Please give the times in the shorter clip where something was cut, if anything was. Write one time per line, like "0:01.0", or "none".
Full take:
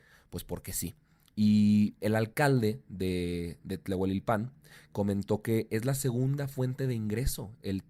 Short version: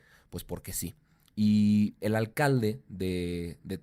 none